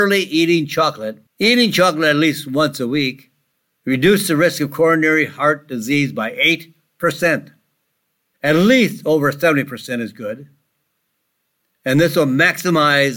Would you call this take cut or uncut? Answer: cut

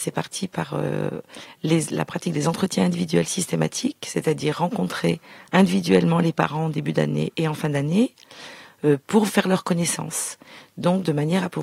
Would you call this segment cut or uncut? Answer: cut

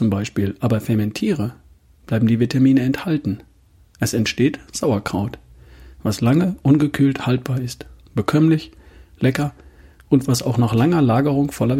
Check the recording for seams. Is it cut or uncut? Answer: uncut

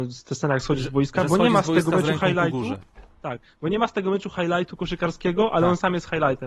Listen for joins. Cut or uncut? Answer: uncut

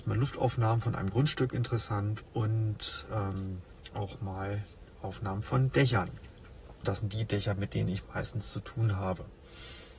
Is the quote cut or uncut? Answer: cut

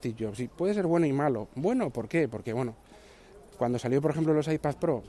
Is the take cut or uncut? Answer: uncut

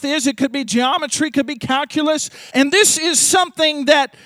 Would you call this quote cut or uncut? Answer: cut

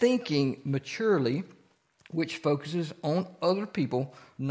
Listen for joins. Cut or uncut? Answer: uncut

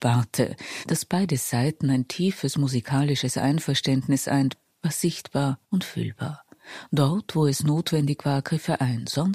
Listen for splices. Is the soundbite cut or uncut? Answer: cut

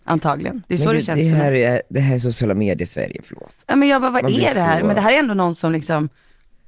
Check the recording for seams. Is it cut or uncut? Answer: uncut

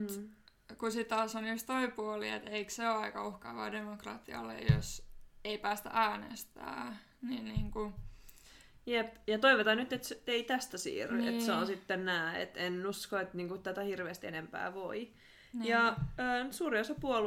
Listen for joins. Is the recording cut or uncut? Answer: uncut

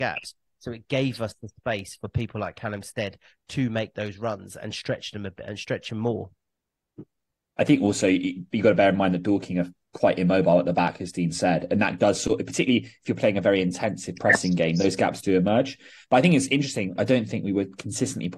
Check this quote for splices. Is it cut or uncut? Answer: cut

